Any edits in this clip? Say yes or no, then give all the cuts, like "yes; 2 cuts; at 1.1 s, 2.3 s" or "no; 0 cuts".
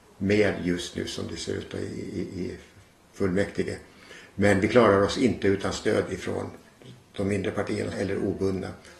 yes; 1 cut; at 7.9 s